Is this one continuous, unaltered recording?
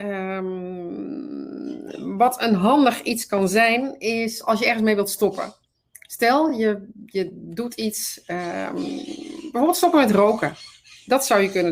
yes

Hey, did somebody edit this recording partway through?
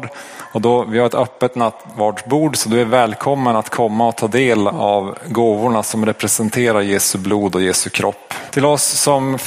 yes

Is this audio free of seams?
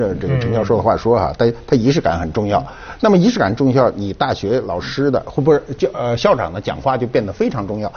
yes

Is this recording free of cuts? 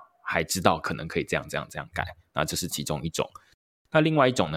yes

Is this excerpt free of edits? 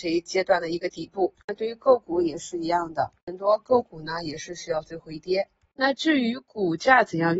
yes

